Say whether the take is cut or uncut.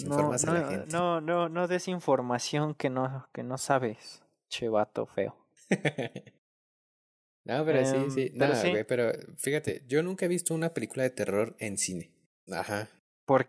cut